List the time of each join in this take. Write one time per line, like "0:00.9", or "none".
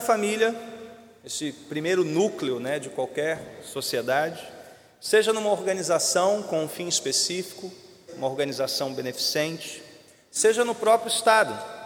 0:08.1